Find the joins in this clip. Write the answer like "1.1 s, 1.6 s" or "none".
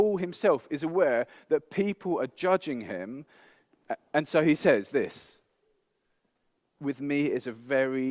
none